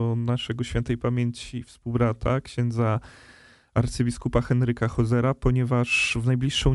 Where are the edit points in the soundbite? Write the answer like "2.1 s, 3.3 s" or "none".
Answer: none